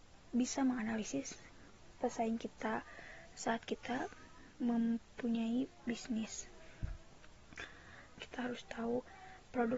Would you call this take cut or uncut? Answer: cut